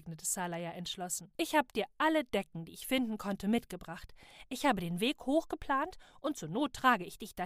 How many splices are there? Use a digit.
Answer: 1